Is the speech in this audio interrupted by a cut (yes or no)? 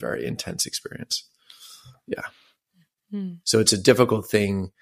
yes